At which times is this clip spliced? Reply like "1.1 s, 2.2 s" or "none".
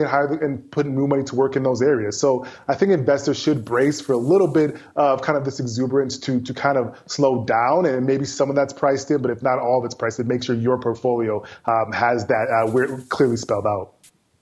none